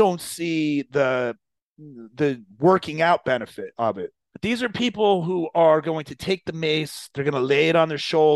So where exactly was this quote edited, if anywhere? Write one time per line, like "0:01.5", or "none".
0:04.3